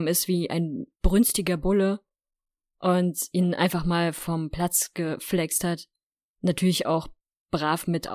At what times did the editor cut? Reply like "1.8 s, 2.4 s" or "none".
0.9 s